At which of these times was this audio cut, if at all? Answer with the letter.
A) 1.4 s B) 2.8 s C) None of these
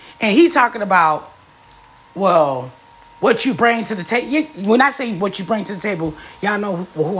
C